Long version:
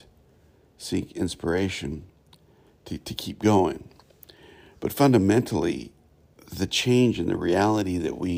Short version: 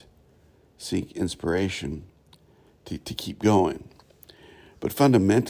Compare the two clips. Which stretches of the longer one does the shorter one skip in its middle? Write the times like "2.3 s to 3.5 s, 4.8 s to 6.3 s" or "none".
none